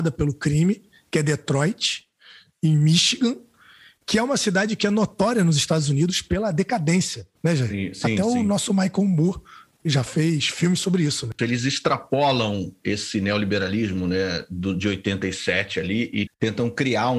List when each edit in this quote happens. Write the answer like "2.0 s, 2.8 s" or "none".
11.4 s, 16.3 s